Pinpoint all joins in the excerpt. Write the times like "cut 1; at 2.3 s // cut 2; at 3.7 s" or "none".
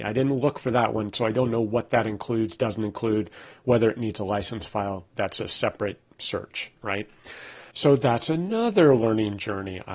cut 1; at 5.1 s